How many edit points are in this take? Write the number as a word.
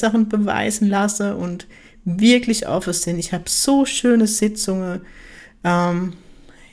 zero